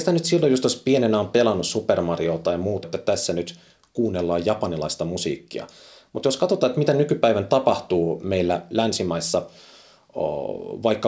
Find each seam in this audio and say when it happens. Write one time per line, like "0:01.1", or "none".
0:02.8